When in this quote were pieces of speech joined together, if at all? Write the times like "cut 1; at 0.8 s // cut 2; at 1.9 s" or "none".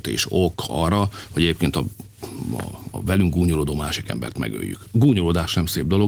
none

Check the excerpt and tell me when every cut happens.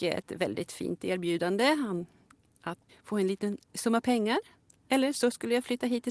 cut 1; at 2.9 s

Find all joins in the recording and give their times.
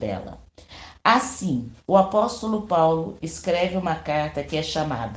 cut 1; at 1.8 s

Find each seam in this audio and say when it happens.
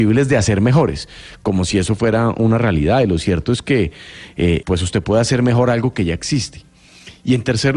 cut 1; at 4.6 s

